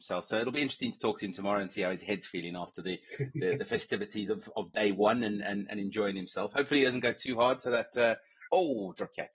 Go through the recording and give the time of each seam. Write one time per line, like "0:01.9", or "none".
none